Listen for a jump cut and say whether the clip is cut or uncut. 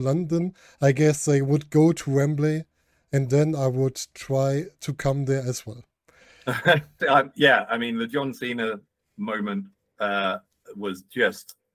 cut